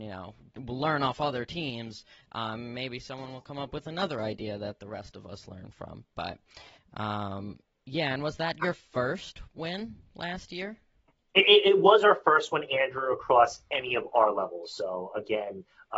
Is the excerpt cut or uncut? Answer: uncut